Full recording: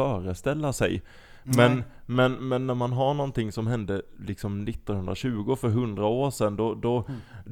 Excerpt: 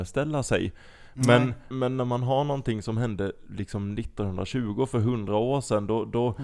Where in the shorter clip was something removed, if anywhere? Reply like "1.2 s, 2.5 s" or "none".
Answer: 1.7 s